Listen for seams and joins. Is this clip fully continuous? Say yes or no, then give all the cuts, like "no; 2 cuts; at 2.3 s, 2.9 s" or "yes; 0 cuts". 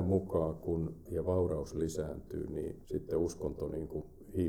no; 2 cuts; at 1.1 s, 2.8 s